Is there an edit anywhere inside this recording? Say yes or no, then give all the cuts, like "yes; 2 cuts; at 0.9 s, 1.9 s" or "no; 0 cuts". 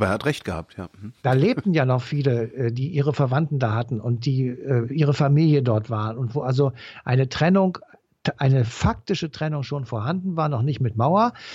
no; 0 cuts